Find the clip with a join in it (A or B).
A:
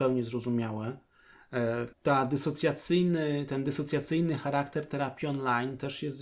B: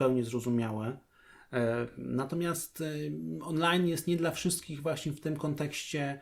A